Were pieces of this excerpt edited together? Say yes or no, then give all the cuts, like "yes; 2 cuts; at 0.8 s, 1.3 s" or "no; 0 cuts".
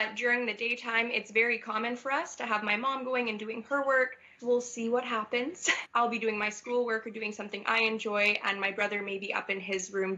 yes; 2 cuts; at 4.4 s, 5.8 s